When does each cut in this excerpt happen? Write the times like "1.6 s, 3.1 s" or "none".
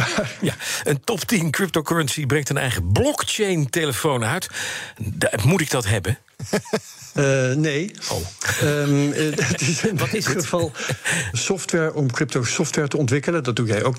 11.3 s